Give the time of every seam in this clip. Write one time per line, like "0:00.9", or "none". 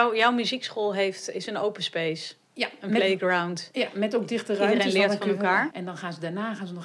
0:05.7